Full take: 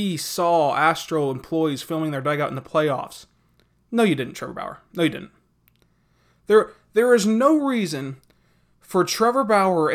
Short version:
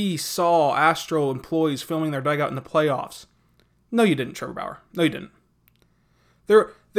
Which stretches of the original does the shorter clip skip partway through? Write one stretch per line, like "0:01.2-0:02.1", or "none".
none